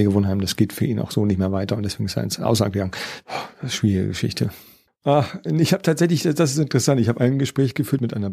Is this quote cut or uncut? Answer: cut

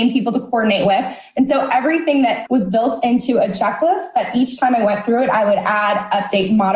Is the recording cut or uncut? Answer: cut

